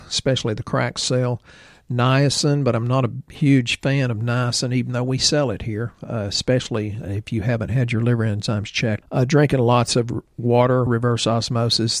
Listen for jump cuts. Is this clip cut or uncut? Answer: cut